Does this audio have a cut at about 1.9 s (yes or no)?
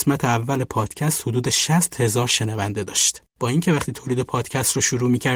no